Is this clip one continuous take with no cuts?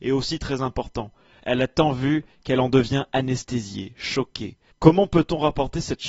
no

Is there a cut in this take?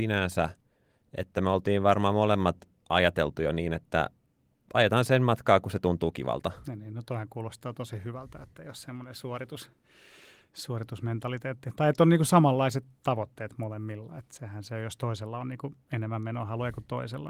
no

